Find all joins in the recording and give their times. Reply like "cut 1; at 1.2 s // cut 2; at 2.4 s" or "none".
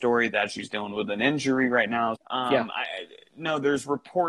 cut 1; at 2.2 s